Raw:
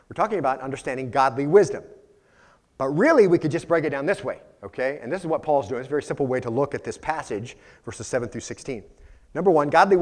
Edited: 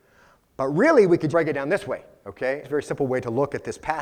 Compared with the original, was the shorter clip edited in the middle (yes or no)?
yes